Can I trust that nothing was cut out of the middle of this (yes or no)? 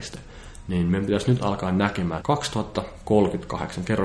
no